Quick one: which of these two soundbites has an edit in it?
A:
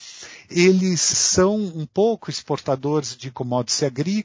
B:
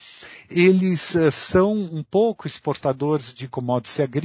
A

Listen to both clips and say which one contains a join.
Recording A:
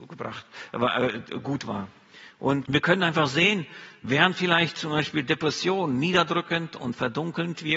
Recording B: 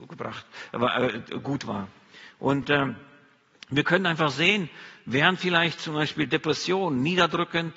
A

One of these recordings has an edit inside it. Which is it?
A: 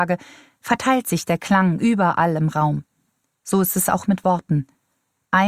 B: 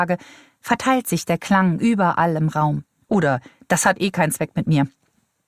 B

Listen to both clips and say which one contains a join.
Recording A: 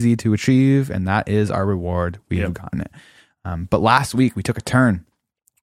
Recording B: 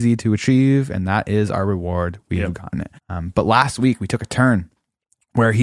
B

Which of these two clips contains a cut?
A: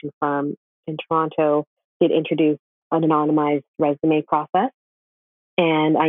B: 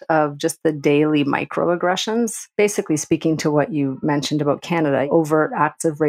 B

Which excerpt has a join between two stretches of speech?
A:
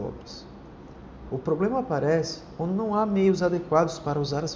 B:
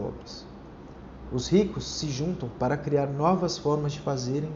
A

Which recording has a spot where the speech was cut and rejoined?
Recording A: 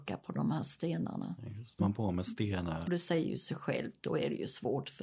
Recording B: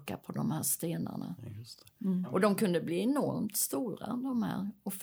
A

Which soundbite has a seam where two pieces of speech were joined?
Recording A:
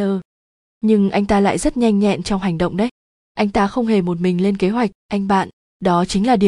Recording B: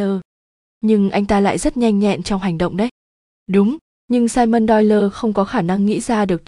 A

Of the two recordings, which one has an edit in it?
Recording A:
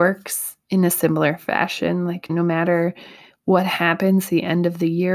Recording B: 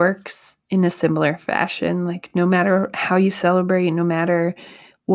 A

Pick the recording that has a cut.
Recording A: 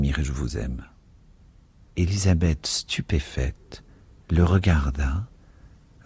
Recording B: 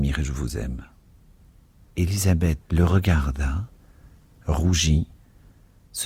B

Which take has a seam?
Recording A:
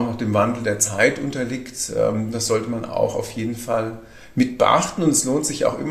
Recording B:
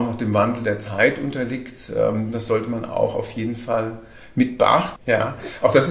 B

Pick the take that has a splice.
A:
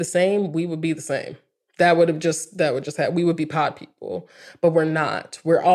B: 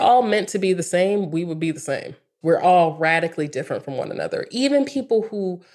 B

